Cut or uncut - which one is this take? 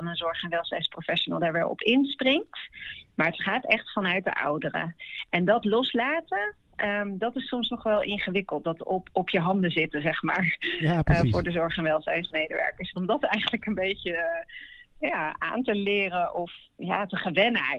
cut